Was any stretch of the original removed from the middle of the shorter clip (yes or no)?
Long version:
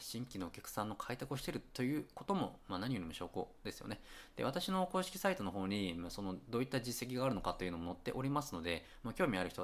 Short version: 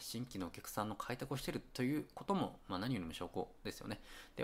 no